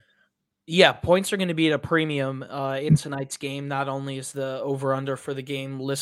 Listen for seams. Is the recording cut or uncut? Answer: uncut